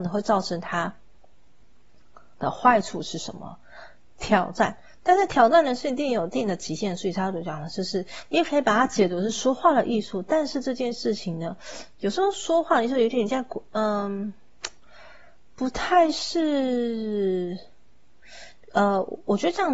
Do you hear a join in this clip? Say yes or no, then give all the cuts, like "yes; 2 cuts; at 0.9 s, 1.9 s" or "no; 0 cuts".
no; 0 cuts